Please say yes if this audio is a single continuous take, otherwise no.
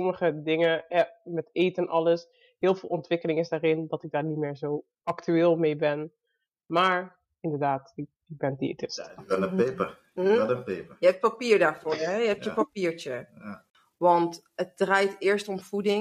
no